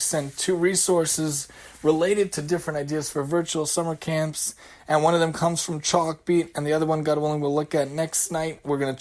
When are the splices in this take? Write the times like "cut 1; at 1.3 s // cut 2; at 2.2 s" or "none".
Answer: none

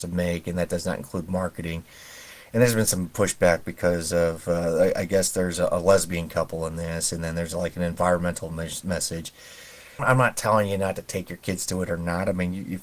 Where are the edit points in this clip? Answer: cut 1; at 10.0 s

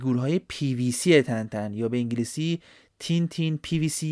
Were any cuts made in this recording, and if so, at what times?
none

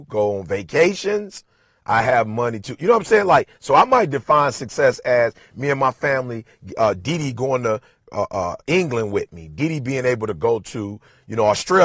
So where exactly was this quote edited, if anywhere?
none

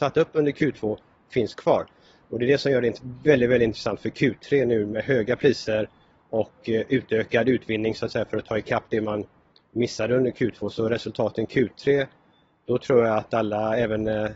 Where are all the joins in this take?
none

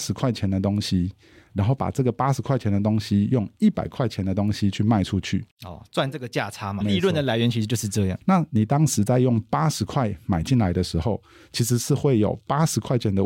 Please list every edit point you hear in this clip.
cut 1; at 6.8 s // cut 2; at 8.2 s

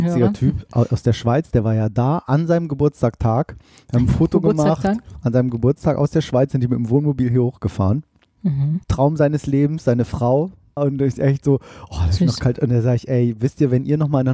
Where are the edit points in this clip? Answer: cut 1; at 8.8 s // cut 2; at 10.8 s

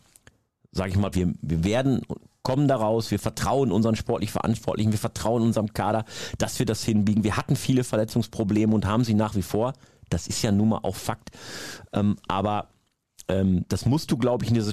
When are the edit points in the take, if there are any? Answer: cut 1; at 1.1 s

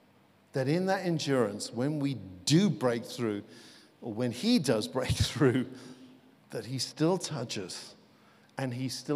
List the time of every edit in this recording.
cut 1; at 6.3 s

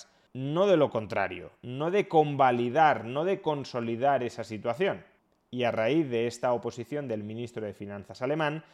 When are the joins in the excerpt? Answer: none

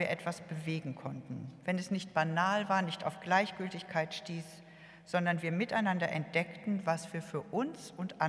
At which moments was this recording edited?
none

